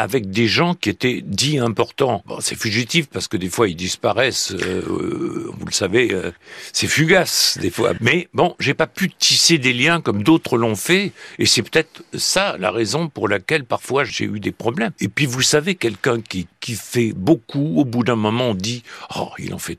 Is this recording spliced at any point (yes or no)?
no